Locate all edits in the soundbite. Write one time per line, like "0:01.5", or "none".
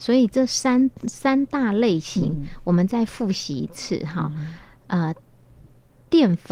none